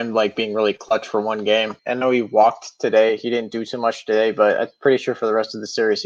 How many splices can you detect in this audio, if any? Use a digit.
1